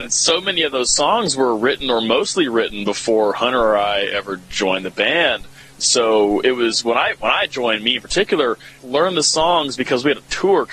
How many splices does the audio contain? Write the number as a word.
one